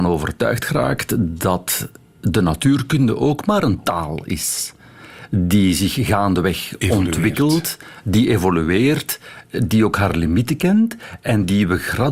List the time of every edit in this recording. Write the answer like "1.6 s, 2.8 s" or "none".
none